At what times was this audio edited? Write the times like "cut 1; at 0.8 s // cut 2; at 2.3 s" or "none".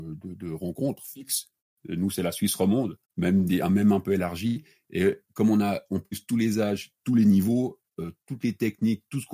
cut 1; at 3.0 s